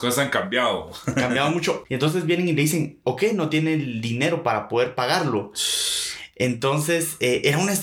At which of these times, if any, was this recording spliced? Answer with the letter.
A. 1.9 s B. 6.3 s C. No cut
A